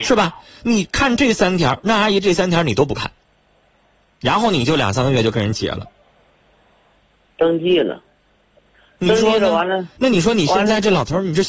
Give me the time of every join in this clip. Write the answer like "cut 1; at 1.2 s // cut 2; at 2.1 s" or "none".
none